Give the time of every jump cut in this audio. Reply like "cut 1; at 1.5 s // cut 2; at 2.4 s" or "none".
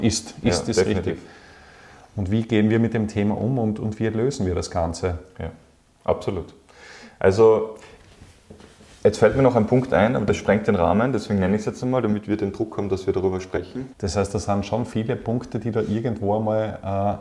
cut 1; at 13.9 s